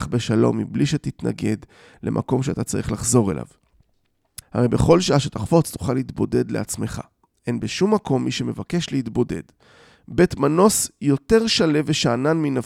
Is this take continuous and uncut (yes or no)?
no